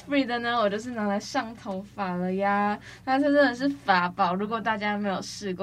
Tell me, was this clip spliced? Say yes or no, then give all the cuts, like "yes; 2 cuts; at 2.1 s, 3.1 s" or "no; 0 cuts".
no; 0 cuts